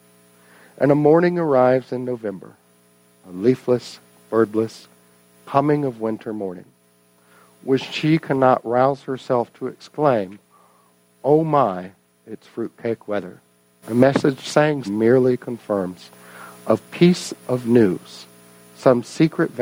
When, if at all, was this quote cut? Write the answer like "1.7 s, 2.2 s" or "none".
13.8 s, 14.8 s, 17.4 s